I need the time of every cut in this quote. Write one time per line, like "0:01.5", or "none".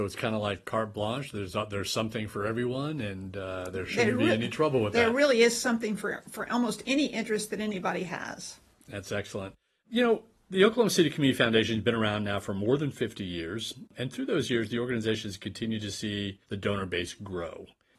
0:16.4

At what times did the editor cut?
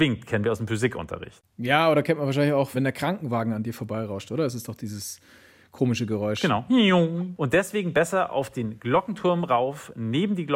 0:02.7

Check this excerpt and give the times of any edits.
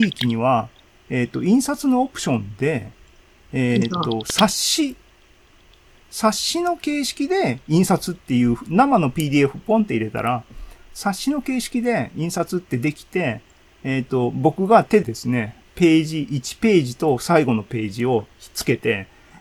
0:15.0

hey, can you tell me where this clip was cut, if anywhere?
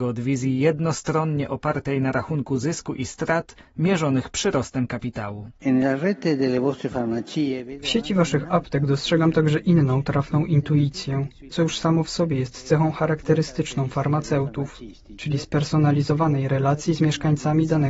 0:11.5

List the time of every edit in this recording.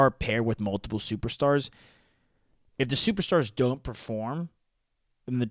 none

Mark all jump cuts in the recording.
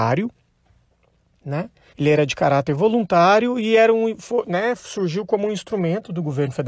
0:01.9

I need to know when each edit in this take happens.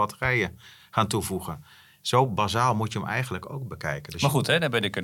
none

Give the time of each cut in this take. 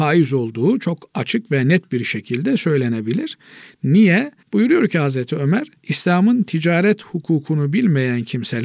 0:04.4
0:05.8

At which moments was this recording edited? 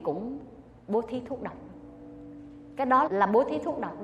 0:03.1

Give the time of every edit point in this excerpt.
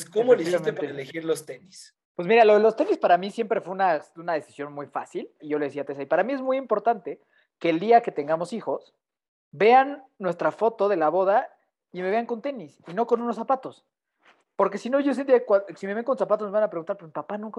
0:02.0
0:05.4

